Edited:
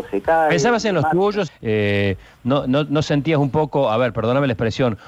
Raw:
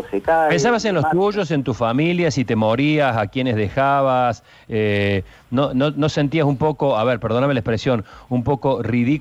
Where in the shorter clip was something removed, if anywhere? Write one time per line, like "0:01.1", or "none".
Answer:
0:01.5